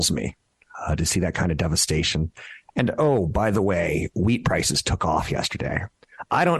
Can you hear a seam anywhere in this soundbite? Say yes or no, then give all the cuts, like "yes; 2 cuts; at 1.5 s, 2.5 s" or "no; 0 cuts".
no; 0 cuts